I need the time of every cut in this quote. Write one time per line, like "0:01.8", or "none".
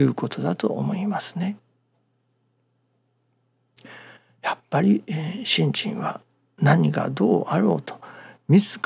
none